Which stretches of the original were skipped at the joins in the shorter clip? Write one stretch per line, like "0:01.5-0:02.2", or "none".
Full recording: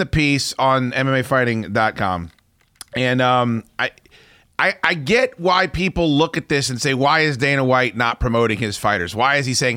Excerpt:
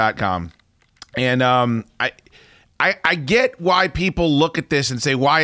none